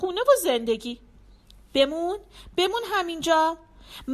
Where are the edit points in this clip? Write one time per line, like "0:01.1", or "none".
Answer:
none